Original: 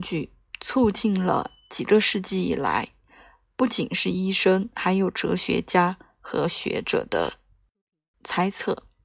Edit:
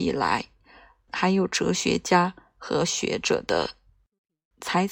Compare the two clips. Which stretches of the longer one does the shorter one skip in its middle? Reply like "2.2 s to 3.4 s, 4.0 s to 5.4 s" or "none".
3.5 s to 4.7 s